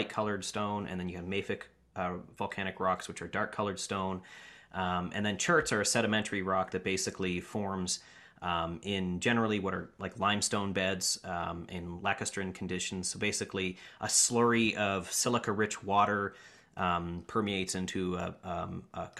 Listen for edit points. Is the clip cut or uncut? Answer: uncut